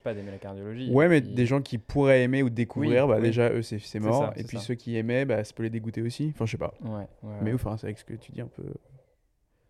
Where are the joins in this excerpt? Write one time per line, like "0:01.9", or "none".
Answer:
none